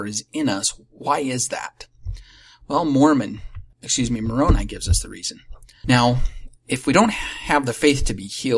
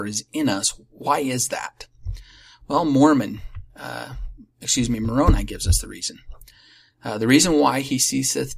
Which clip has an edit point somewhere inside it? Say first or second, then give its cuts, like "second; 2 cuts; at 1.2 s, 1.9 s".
first; 2 cuts; at 3.7 s, 5.8 s